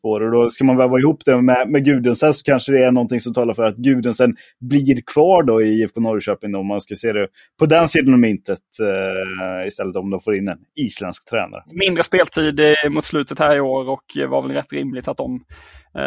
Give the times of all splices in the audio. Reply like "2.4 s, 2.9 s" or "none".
11.6 s